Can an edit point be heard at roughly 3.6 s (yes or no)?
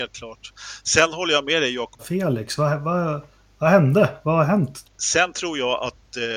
no